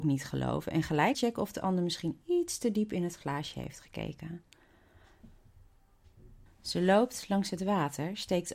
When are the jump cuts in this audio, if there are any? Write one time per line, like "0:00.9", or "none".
0:01.1
0:06.5